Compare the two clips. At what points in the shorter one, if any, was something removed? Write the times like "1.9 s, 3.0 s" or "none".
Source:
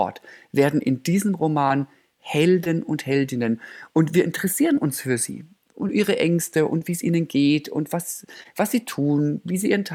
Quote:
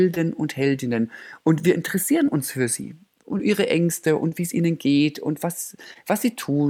none